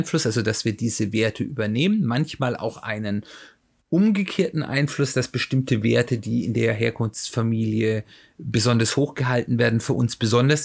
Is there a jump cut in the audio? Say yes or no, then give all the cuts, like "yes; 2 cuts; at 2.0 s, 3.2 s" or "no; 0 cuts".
no; 0 cuts